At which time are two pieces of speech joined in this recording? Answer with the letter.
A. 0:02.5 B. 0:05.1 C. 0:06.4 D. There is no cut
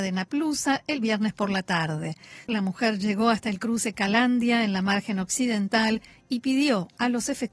A